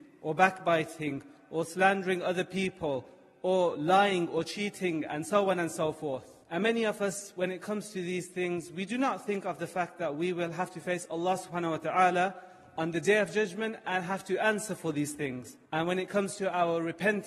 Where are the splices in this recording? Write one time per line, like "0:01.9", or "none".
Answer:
0:06.4
0:15.7